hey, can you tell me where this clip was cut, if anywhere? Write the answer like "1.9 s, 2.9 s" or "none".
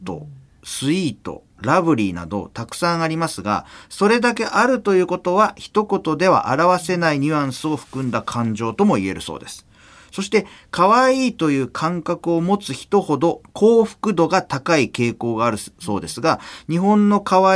none